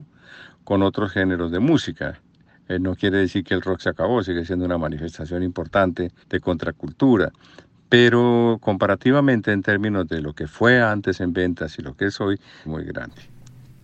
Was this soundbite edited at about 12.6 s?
yes; 2 cuts; at 6.2 s, 12.6 s

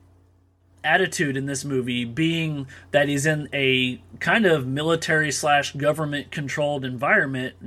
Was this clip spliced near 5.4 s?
no; 0 cuts

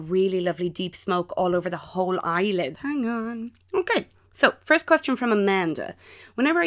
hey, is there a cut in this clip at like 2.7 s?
yes; 1 cut; at 2.7 s

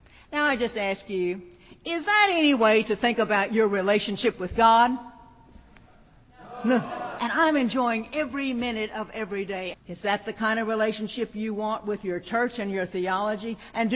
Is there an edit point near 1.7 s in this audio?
no; 2 cuts; at 7.2 s, 9.7 s

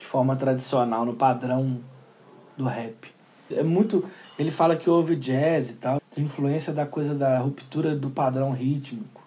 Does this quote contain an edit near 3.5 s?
yes; 2 cuts; at 3.5 s, 6.0 s

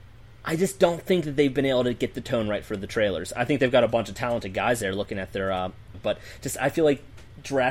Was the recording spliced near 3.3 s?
no; 1 cut; at 5.9 s

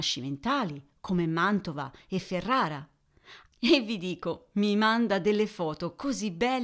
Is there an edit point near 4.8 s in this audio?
no; 1 cut; at 3.5 s

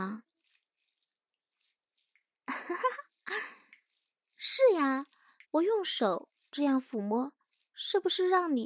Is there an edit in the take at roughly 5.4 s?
yes; 1 cut; at 5.4 s

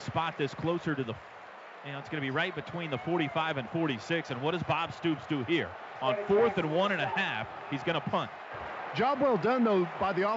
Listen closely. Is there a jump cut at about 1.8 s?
no; 0 cuts

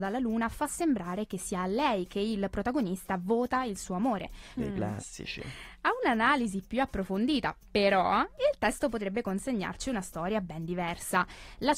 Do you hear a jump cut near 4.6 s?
yes; 1 cut; at 4.6 s

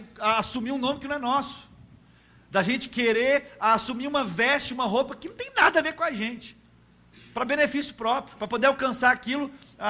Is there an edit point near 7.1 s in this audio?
no; 0 cuts

